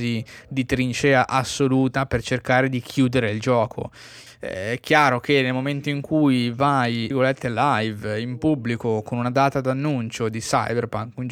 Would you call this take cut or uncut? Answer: cut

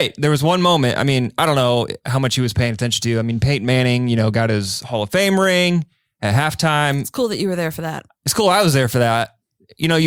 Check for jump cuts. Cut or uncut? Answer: uncut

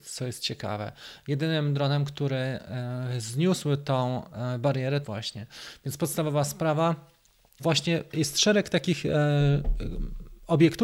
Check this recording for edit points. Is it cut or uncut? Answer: cut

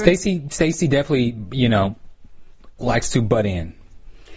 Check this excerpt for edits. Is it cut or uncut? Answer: uncut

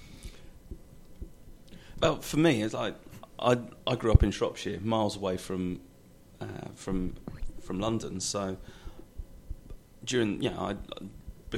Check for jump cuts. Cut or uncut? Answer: cut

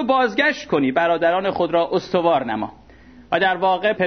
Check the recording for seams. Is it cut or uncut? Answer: uncut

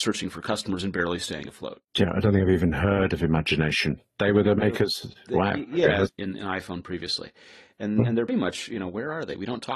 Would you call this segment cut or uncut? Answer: cut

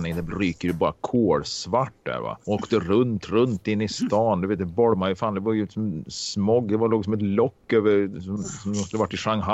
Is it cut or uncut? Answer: cut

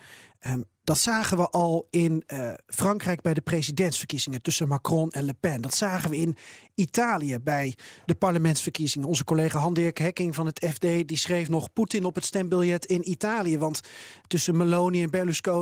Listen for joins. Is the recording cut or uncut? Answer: uncut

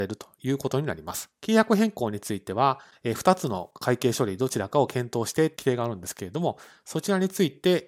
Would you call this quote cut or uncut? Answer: cut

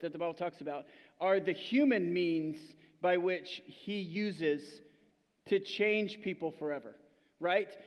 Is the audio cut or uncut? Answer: uncut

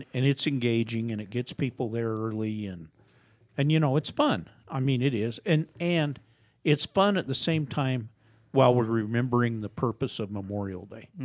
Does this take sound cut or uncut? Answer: uncut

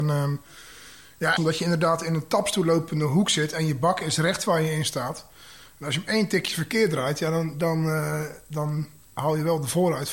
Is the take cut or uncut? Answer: cut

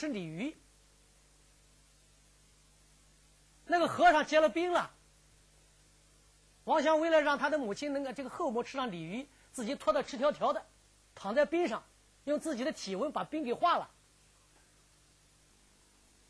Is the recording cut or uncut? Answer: uncut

